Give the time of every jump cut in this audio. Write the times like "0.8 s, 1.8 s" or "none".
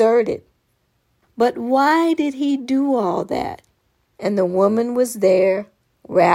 1.2 s, 4.1 s